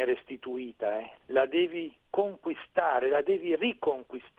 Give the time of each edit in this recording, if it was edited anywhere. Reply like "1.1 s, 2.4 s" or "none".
2.0 s